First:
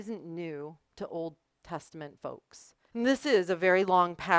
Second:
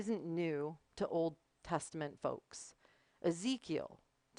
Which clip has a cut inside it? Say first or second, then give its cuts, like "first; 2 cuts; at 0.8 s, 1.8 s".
first; 1 cut; at 2.9 s